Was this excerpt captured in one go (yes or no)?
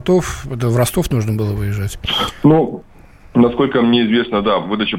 yes